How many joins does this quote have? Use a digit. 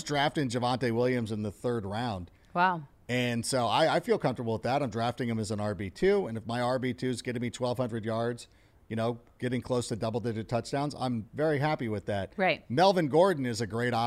0